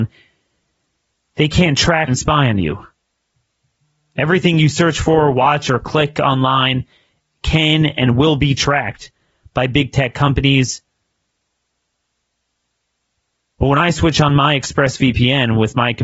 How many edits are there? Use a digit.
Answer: 1